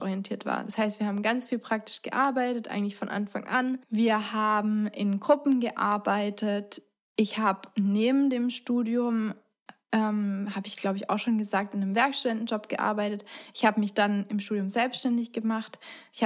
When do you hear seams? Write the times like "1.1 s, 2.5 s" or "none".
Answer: none